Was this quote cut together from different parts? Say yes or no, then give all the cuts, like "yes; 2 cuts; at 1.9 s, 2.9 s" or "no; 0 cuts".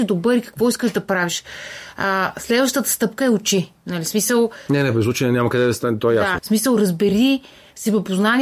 yes; 1 cut; at 6.4 s